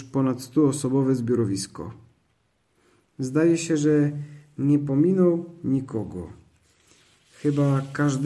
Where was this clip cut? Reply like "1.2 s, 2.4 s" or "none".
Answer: none